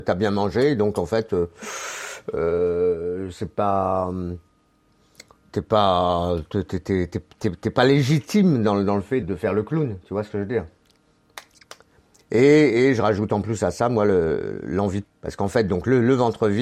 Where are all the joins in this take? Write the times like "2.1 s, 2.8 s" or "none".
9.2 s, 15.0 s

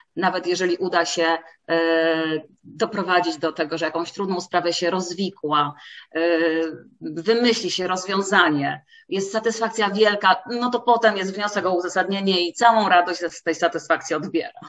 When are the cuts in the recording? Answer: none

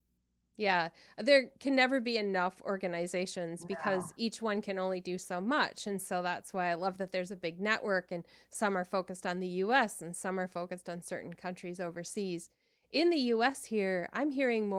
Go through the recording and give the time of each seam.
none

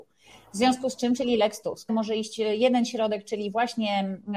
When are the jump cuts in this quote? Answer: 1.9 s

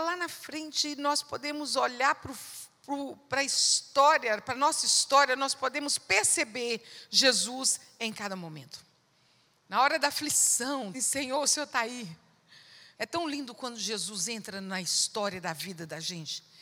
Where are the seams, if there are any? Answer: 10.9 s, 12.9 s

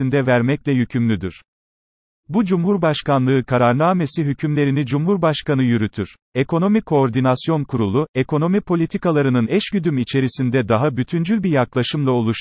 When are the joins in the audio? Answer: 6.2 s

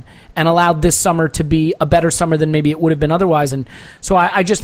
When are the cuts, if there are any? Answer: 3.5 s

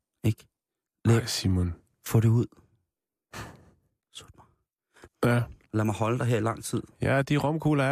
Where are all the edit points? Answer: 5.1 s

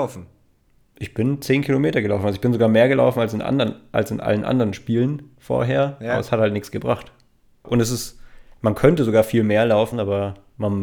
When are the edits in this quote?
7.6 s, 9.9 s

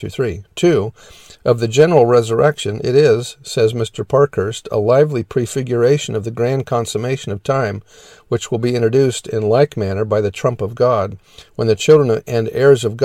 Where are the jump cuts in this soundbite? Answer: none

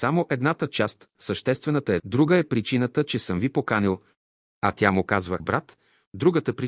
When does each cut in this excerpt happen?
2.0 s, 5.4 s

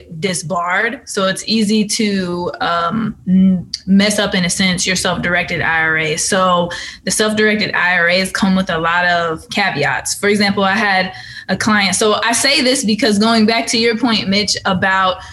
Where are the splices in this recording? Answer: none

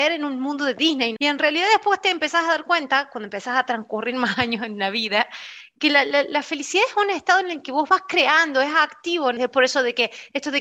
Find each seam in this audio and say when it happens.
1.2 s, 9.4 s

